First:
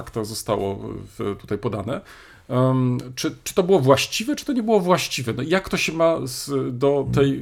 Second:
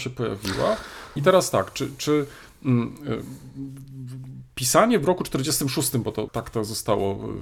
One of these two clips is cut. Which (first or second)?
second